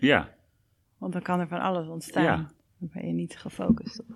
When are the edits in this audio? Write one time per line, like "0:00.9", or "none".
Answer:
none